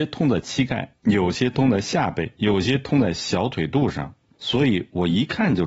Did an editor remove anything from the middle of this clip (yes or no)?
yes